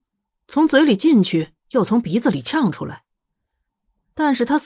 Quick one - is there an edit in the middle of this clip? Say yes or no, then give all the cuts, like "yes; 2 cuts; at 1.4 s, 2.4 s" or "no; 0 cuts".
yes; 1 cut; at 3.6 s